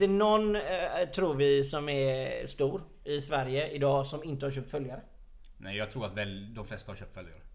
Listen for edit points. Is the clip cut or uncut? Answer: uncut